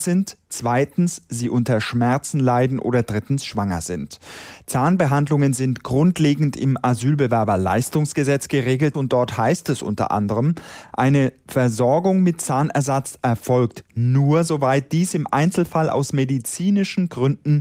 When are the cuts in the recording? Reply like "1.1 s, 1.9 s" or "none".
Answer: none